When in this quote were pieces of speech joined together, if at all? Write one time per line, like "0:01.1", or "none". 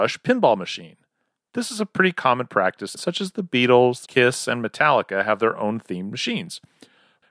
0:03.0
0:04.0